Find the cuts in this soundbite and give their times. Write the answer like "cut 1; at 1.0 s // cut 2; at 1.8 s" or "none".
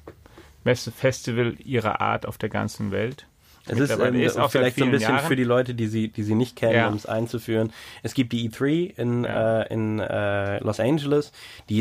none